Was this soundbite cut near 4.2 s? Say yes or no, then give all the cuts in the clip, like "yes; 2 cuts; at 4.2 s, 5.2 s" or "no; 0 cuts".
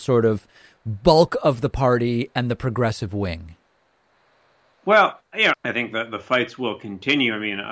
no; 1 cut; at 5.5 s